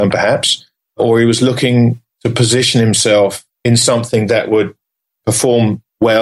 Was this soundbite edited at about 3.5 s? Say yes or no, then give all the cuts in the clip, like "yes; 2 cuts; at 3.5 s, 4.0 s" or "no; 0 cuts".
yes; 1 cut; at 3.5 s